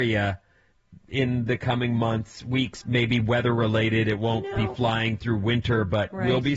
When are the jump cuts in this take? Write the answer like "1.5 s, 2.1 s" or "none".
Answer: 2.8 s

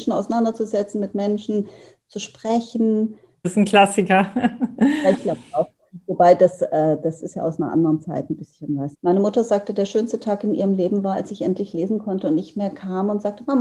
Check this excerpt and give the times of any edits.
3.4 s, 8.9 s

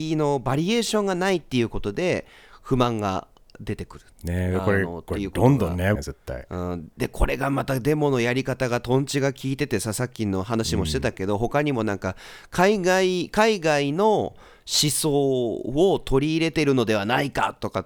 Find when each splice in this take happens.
4.1 s, 6.0 s

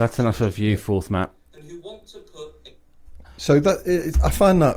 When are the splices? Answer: none

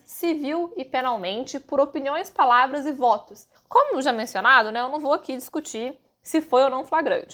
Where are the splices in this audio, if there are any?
3.6 s

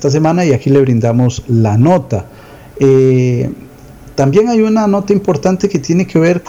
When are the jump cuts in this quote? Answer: none

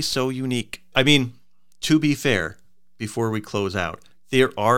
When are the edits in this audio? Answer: 0.9 s

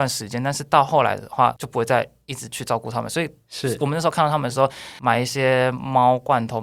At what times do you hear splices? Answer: none

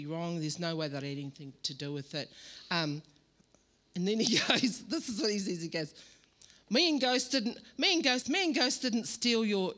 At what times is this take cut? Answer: 1.5 s, 8.2 s

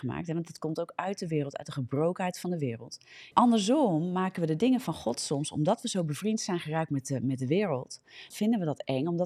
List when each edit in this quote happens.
3.3 s, 8.3 s

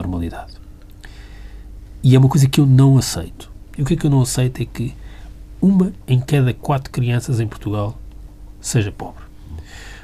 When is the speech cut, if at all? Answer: 3.8 s

